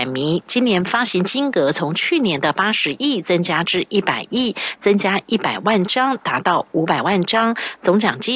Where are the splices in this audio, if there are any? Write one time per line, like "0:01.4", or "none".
none